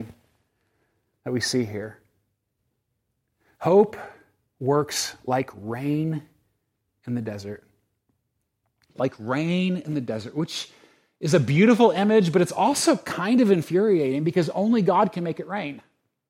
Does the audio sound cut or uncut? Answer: uncut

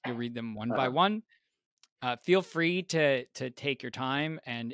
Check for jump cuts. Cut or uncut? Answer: uncut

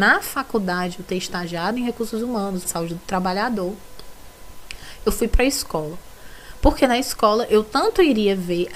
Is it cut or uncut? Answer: cut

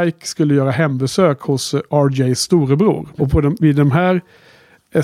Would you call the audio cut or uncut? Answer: cut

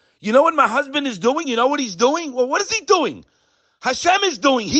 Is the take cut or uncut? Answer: uncut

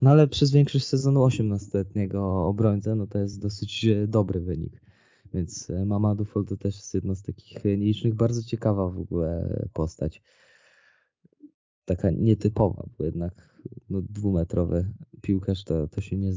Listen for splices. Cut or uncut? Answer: uncut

